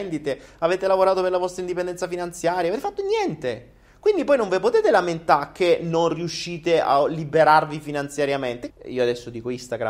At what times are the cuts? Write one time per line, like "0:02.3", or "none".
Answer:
0:08.7